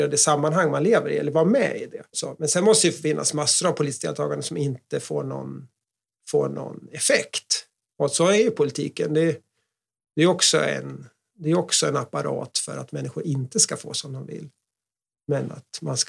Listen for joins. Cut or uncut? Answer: cut